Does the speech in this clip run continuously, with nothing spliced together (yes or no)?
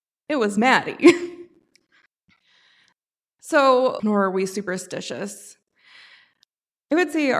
no